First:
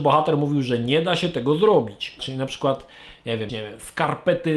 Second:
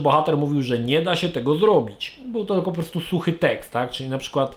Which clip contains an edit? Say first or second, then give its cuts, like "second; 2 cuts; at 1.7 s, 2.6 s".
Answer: first; 2 cuts; at 2.2 s, 3.5 s